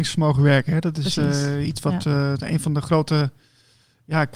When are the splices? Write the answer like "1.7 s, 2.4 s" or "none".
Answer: none